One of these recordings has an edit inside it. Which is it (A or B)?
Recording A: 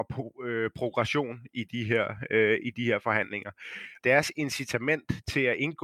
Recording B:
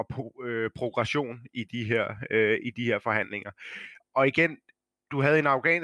A